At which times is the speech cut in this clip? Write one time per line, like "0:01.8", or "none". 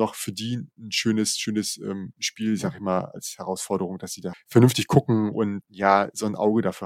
0:03.1
0:04.3
0:05.6